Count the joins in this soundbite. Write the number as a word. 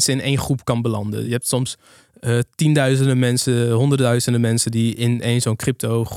zero